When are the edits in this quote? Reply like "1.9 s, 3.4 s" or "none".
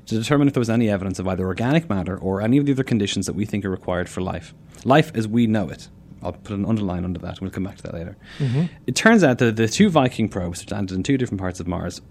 none